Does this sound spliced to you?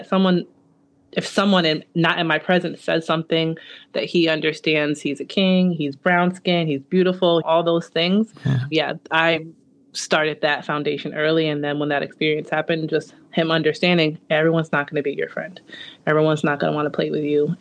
yes; 2 cuts; at 7.4 s, 8.7 s

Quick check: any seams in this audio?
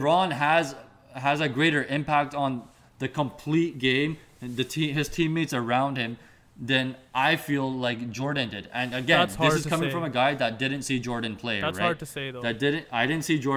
no; 0 cuts

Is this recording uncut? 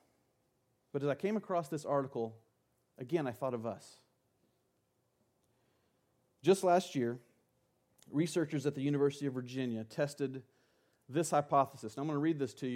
yes; 0 cuts

